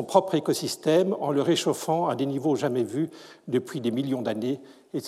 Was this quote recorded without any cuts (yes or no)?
yes